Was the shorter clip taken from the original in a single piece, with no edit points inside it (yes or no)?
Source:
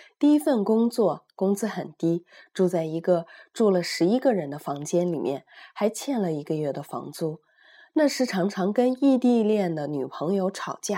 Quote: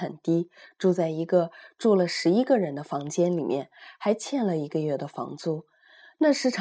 yes